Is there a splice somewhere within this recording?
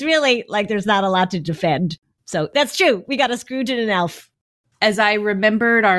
no; 0 cuts

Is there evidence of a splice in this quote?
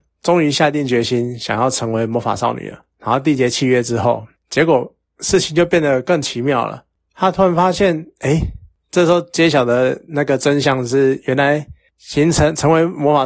yes; 1 cut; at 6.0 s

